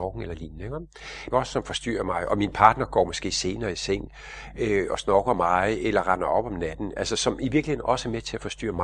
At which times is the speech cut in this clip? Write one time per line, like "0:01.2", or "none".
0:01.3

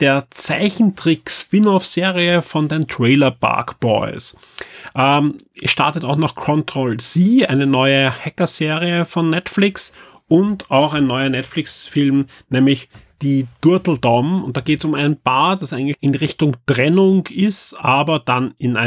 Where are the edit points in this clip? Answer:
0:15.9

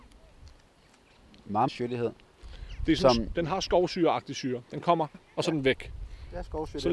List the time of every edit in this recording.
0:01.7
0:05.1

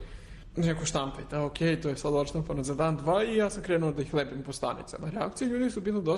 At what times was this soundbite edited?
none

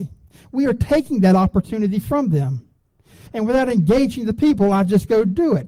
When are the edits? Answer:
0:03.3

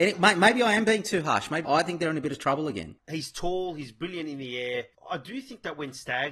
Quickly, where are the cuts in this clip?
0:01.6
0:03.0
0:04.9

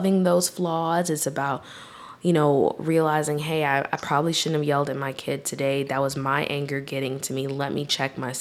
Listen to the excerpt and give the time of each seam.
none

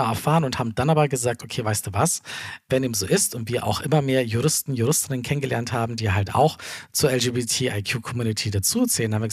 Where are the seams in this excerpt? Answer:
none

